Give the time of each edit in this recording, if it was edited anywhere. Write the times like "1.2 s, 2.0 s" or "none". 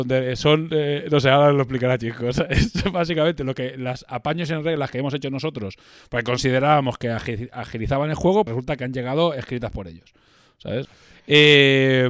8.5 s, 10.8 s